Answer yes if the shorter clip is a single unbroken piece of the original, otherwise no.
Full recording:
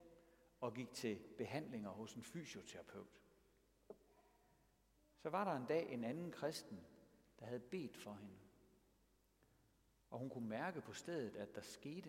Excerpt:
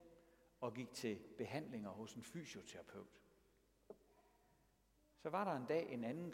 yes